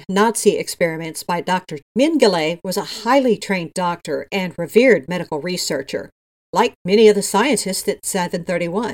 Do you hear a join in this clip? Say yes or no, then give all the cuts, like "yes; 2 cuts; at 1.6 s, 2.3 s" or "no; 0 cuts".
yes; 1 cut; at 1.8 s